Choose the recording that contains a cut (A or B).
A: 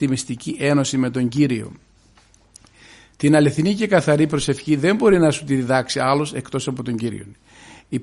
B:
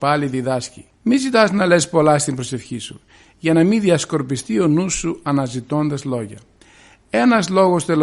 B